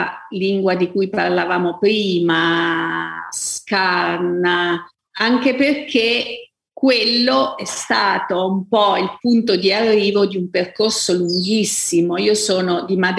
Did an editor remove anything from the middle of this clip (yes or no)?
no